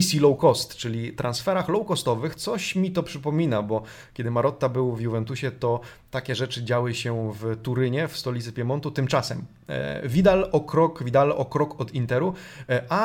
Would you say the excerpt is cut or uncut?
uncut